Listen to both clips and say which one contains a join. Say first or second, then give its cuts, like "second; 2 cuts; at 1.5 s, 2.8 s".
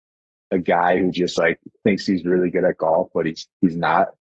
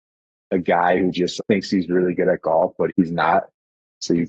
second; 2 cuts; at 1.4 s, 2.9 s